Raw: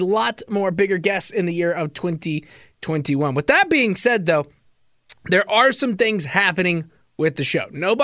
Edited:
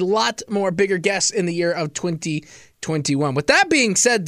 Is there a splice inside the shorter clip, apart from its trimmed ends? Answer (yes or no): no